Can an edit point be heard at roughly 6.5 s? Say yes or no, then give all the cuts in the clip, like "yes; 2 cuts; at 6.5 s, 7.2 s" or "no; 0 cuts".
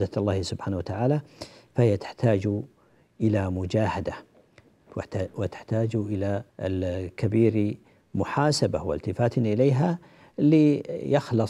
yes; 1 cut; at 6.5 s